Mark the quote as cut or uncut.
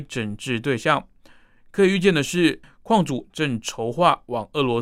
cut